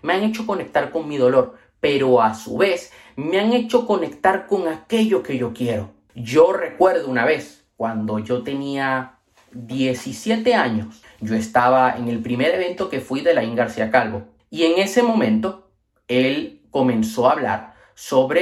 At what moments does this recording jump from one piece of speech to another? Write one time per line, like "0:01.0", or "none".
none